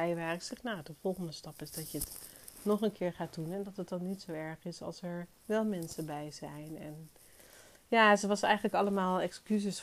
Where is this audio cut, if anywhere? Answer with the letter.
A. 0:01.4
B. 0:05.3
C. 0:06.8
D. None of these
B